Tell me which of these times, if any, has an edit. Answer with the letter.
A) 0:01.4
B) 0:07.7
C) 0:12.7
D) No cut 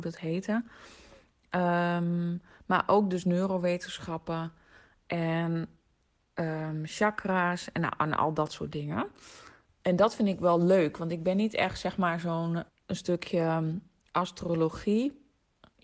C